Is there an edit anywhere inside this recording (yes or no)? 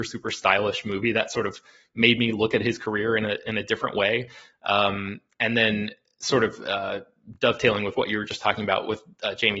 no